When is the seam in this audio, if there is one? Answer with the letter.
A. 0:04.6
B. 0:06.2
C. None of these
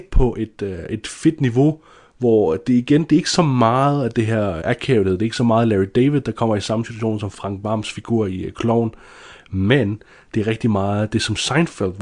A